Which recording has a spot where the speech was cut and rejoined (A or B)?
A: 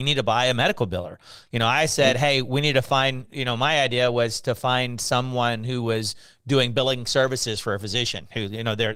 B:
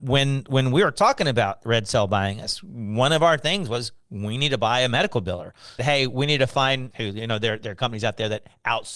B